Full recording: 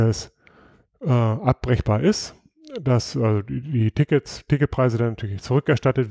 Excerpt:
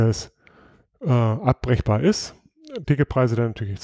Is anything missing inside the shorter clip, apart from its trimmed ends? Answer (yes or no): yes